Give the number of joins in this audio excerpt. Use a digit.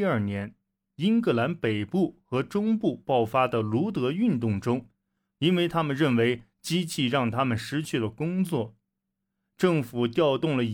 1